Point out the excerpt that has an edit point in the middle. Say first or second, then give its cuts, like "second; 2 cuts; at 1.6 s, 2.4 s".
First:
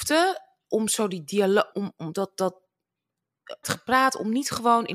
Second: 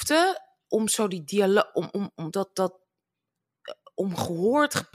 first; 2 cuts; at 1.7 s, 3.6 s